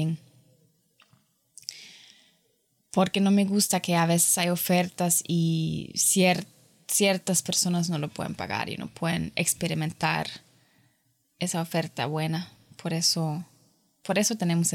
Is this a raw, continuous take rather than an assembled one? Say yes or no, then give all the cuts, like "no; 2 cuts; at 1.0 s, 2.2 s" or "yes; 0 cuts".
yes; 0 cuts